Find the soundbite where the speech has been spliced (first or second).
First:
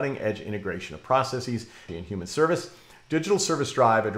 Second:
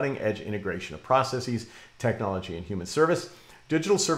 first